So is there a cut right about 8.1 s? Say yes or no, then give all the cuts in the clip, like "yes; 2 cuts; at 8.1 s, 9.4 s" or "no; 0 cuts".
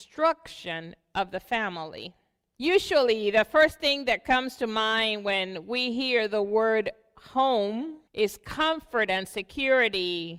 yes; 2 cuts; at 2.5 s, 8.1 s